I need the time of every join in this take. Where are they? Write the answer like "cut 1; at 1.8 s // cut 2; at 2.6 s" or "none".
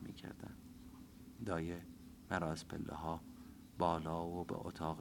cut 1; at 1.4 s